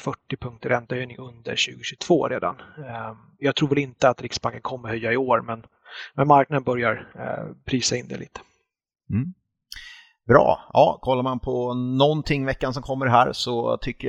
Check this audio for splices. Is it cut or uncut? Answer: uncut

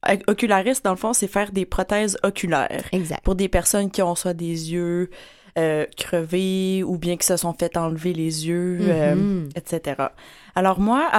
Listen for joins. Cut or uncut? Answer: uncut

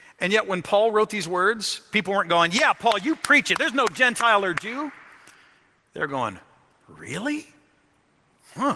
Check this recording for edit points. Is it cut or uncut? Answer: uncut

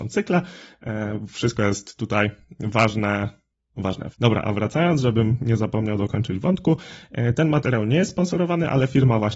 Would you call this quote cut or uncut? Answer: cut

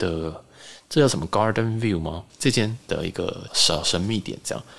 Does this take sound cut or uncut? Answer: cut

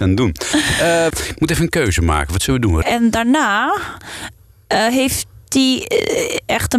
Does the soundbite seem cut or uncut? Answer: cut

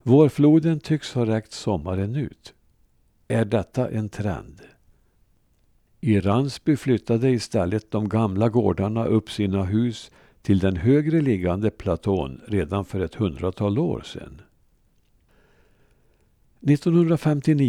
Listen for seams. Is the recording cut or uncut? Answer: cut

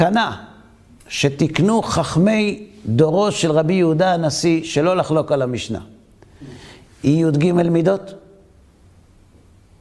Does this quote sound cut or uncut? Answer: uncut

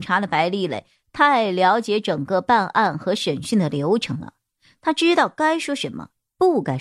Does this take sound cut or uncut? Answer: uncut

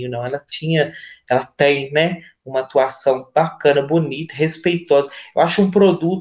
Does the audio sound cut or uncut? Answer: uncut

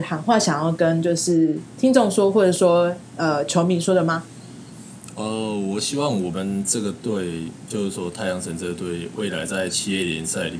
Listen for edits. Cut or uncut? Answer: uncut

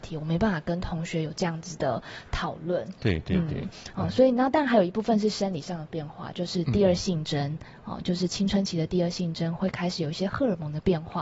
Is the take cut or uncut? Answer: uncut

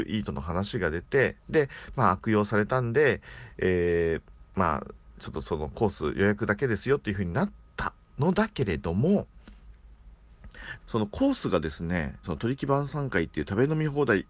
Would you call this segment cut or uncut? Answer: cut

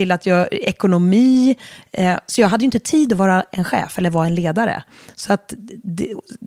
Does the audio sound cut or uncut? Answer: uncut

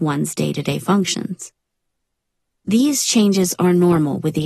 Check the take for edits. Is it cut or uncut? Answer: uncut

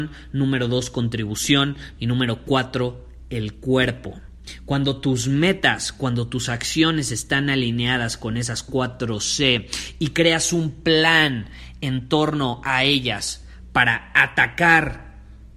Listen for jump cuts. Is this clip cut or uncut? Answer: cut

